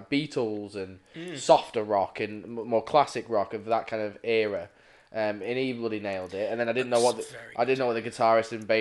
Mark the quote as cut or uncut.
uncut